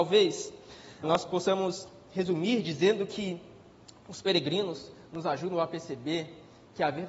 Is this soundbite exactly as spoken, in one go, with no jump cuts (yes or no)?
no